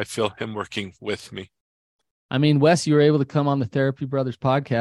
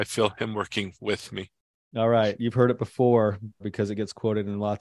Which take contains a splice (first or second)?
second